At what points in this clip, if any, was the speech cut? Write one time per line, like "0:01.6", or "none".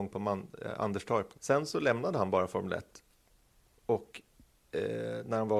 0:01.3